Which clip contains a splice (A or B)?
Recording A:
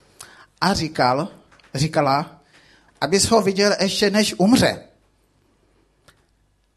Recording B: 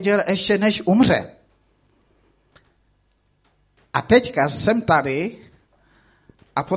A